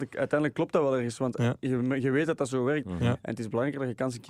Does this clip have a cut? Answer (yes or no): yes